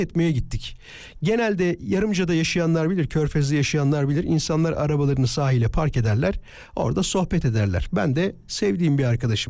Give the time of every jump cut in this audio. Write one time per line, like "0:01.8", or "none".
none